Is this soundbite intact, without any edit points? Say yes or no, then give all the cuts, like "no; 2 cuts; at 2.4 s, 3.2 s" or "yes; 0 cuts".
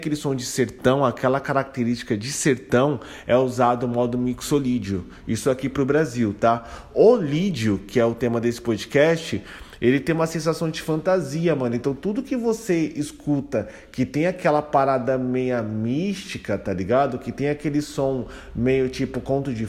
yes; 0 cuts